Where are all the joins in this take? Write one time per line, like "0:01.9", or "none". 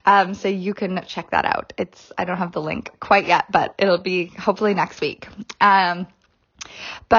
none